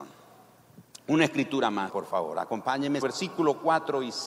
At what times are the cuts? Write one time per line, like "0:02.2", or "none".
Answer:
0:01.9
0:03.0